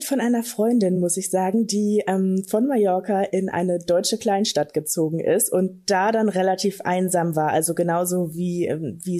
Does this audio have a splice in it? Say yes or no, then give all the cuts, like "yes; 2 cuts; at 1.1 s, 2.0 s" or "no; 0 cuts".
no; 0 cuts